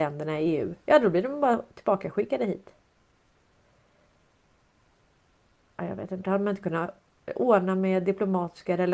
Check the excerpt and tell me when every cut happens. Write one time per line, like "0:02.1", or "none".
0:06.2